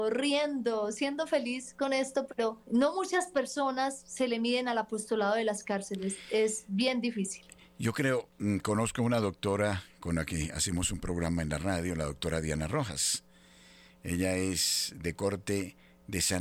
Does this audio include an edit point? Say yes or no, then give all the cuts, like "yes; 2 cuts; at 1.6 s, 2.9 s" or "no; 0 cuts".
yes; 1 cut; at 2.6 s